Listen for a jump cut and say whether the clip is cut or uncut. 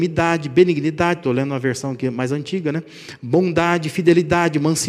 uncut